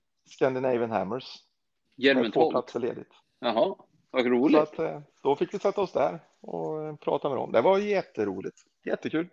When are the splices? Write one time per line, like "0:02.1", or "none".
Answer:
0:01.9
0:03.2